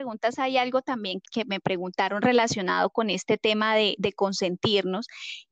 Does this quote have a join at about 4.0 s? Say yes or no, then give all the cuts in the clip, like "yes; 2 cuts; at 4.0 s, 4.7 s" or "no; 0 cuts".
no; 1 cut; at 1.2 s